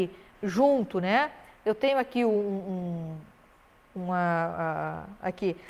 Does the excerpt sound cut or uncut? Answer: uncut